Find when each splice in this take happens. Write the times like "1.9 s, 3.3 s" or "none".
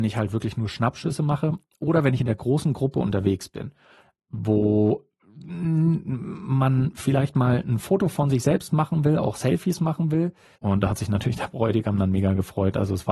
10.5 s